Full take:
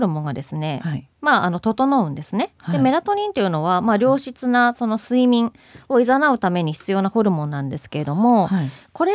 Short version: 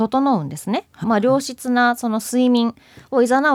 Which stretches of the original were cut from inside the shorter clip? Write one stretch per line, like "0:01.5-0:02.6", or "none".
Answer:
0:02.7-0:03.8

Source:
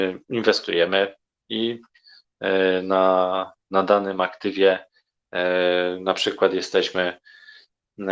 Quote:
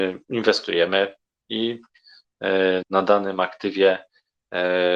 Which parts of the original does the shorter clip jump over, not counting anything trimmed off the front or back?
0:02.8-0:03.6

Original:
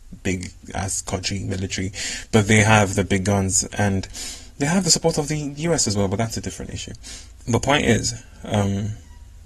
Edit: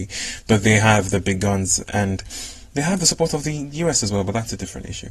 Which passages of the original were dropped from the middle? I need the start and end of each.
none

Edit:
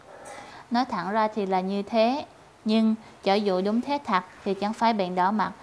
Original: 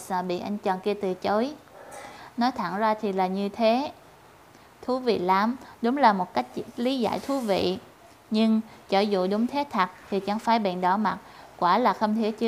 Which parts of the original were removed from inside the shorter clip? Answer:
0:04.2-0:08.2

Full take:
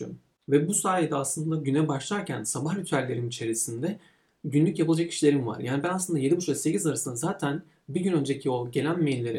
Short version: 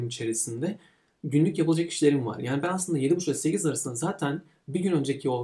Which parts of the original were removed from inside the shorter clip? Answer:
none

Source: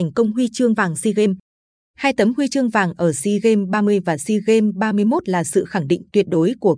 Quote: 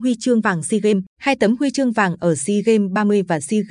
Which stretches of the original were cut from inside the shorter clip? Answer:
0:01.4-0:01.9

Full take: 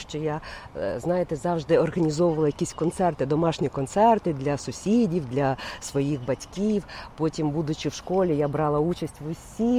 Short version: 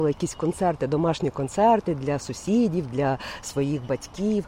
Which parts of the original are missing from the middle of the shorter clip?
none

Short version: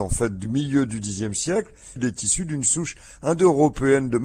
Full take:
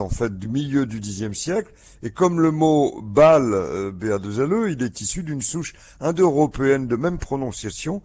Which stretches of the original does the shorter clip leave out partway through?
0:02.0-0:04.7

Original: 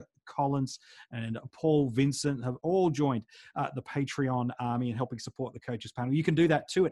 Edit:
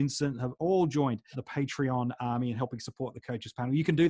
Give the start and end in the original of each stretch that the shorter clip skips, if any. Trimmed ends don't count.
0:03.4-0:03.7

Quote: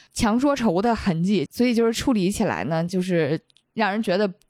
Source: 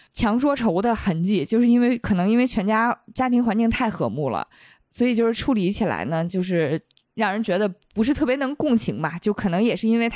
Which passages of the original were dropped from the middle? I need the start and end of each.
0:01.5-0:04.9

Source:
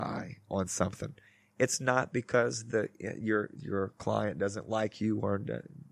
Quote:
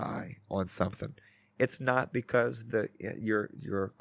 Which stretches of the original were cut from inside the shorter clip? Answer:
none

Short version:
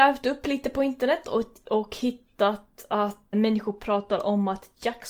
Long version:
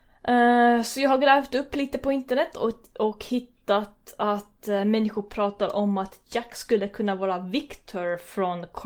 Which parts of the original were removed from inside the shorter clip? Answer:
0:04.6-0:04.8

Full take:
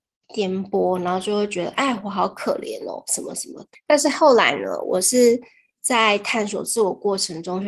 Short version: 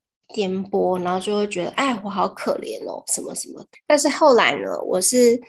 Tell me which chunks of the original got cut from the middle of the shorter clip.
none

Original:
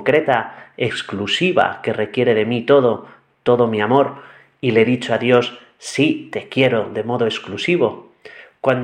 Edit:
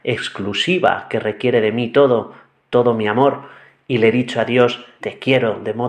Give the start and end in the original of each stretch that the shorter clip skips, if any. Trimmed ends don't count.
0:05.7-0:06.3

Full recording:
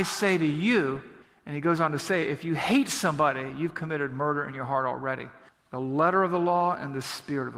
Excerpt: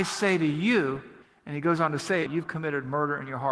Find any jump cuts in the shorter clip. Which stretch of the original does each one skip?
0:02.3-0:03.5

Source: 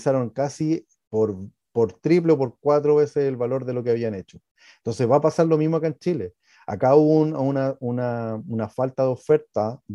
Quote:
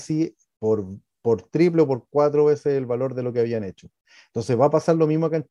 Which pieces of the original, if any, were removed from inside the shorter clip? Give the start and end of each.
none

